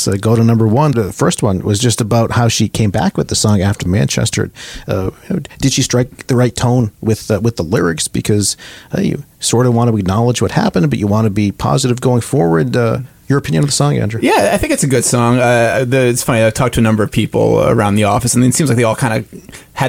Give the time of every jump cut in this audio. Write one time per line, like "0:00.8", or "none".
0:00.9